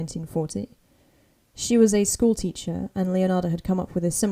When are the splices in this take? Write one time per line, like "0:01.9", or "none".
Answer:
none